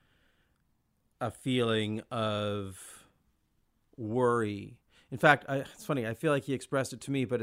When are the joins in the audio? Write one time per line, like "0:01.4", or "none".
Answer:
none